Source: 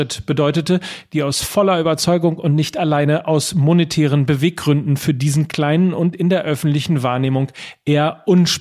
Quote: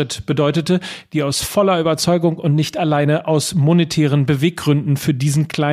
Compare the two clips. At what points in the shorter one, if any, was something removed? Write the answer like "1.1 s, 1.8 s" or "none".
none